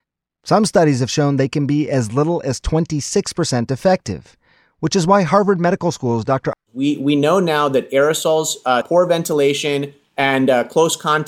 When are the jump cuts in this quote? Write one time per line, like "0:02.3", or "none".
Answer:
0:06.5
0:08.8
0:10.0